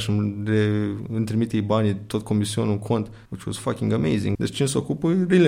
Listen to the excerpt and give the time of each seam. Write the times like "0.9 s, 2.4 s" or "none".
3.3 s, 4.4 s